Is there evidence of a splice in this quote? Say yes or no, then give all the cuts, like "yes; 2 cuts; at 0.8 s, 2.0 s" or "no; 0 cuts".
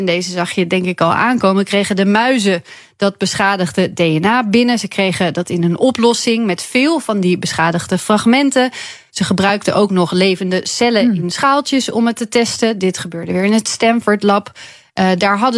no; 0 cuts